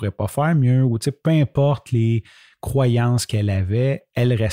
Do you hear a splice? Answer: no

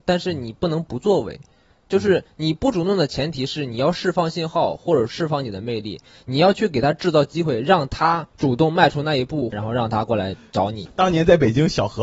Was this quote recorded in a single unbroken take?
yes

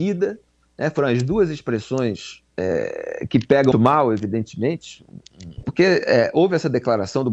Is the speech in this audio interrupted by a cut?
yes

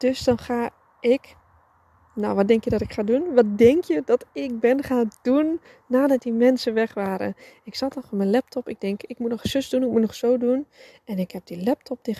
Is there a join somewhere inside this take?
no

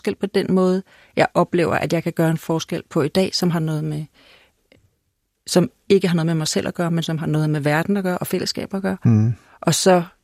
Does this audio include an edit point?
no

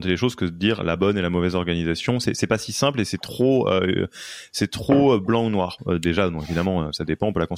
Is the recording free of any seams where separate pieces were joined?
yes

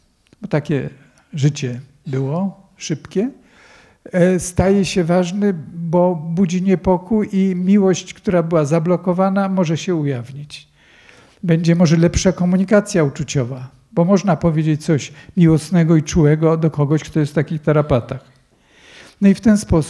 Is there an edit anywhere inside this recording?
no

